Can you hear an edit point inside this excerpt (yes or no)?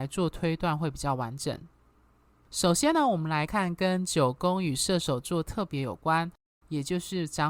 yes